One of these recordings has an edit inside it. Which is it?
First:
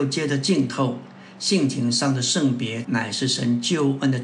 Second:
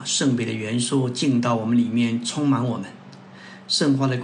first; 1 cut; at 2.8 s

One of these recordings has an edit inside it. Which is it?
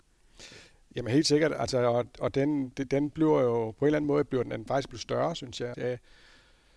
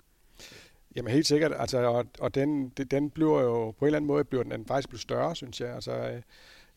first; 1 cut; at 5.7 s

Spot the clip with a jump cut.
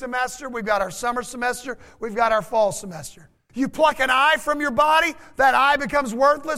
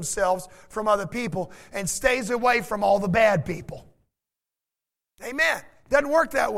first; 1 cut; at 3.5 s

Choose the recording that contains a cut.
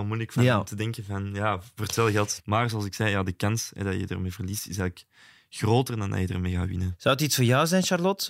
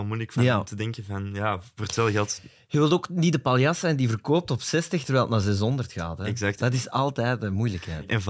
first; 1 cut; at 2.4 s

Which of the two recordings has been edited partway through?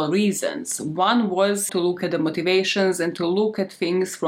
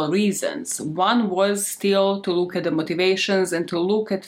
first; 1 cut; at 1.7 s

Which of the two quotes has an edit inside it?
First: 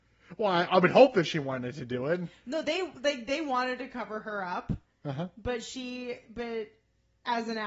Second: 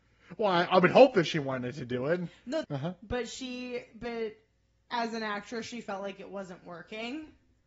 second; 1 cut; at 2.6 s

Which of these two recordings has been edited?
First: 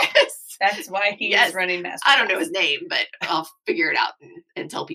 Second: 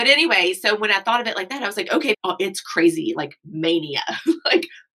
second; 1 cut; at 2.1 s

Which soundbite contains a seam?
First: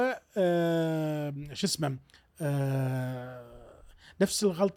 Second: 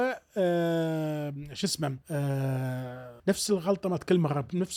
second; 2 cuts; at 2.0 s, 3.2 s

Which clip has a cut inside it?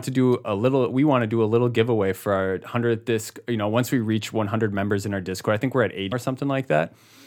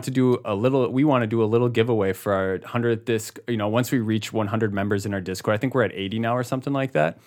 first; 1 cut; at 6.1 s

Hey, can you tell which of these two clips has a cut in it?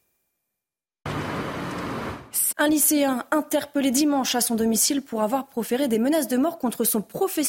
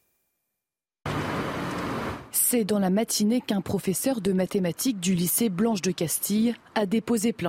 first; 1 cut; at 2.5 s

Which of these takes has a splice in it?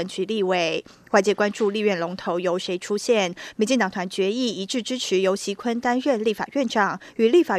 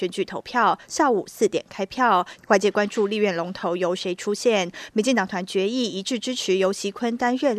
second; 1 cut; at 2.4 s

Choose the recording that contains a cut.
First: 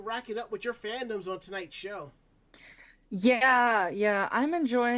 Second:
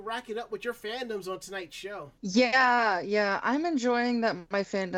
second; 1 cut; at 2.2 s

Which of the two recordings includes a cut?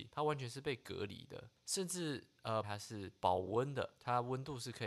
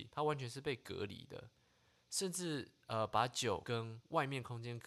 first; 2 cuts; at 1.6 s, 2.6 s

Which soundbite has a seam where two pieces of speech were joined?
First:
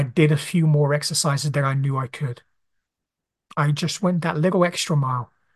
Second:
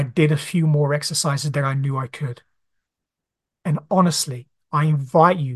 second; 1 cut; at 3.4 s

